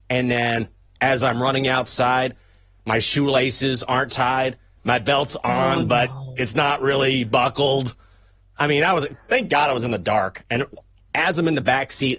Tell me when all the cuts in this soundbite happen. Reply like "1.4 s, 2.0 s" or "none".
none